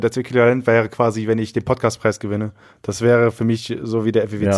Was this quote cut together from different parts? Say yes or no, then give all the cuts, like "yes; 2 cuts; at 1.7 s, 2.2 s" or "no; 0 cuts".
no; 0 cuts